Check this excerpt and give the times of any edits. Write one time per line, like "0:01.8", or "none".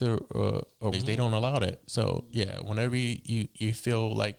0:00.9